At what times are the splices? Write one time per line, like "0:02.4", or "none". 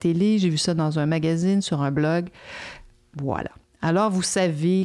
none